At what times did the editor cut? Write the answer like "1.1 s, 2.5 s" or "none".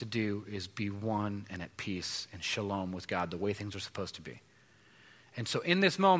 none